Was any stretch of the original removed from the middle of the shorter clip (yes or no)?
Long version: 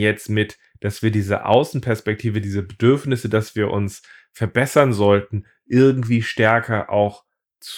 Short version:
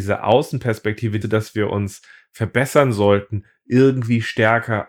yes